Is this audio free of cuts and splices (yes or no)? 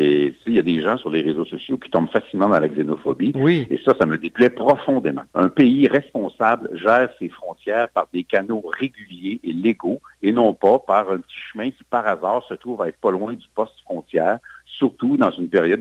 no